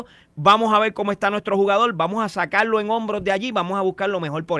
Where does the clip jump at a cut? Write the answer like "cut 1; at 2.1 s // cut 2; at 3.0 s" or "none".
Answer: none

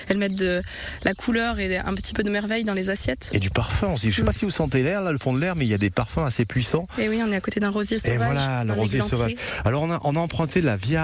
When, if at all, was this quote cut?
none

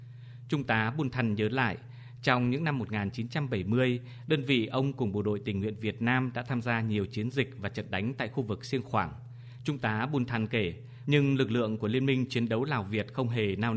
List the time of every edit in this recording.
cut 1; at 9.6 s // cut 2; at 11.0 s

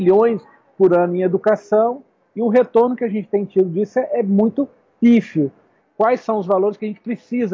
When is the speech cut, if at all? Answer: cut 1; at 5.8 s

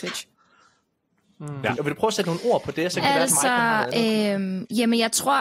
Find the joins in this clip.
cut 1; at 1.8 s

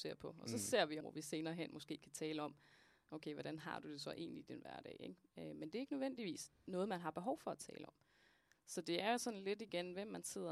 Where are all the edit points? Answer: cut 1; at 1.0 s

